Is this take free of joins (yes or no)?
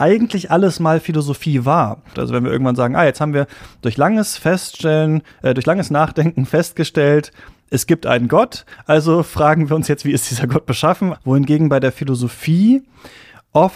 no